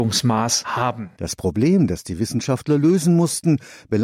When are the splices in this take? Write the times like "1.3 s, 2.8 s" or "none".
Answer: none